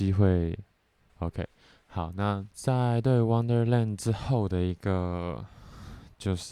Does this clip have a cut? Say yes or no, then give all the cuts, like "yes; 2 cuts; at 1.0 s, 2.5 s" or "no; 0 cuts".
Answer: yes; 2 cuts; at 1.1 s, 2.5 s